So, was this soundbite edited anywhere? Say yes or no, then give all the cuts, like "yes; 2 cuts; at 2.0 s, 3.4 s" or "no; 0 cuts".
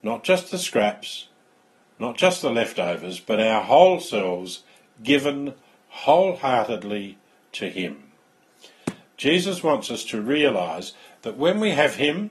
no; 0 cuts